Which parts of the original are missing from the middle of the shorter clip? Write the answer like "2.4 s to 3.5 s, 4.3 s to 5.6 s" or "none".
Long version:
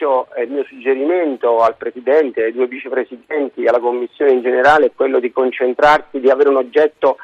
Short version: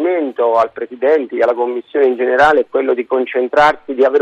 2.4 s to 3.6 s